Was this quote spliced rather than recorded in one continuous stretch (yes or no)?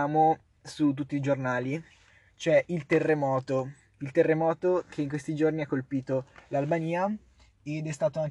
no